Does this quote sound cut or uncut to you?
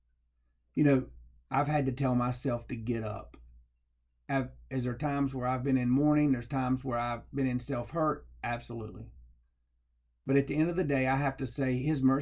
uncut